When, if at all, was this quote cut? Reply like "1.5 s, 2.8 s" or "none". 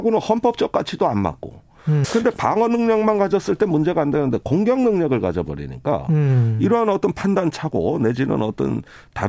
2.0 s